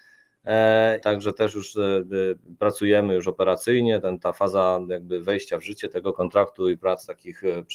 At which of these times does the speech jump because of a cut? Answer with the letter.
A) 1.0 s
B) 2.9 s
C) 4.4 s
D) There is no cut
A